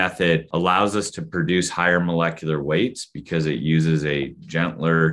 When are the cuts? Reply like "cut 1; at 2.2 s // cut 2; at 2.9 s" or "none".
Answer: none